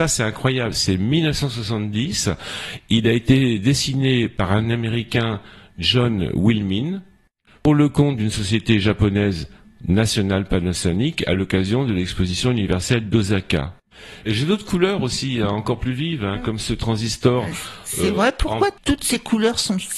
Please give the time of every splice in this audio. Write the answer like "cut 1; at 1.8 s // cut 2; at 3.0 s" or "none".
cut 1; at 14.2 s